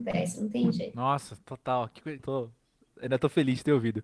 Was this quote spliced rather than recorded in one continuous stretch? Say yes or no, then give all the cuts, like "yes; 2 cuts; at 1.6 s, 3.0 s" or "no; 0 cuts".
yes; 1 cut; at 2.2 s